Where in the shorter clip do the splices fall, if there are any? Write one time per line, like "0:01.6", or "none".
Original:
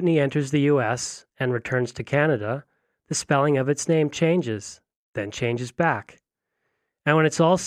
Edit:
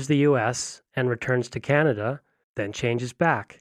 0:02.4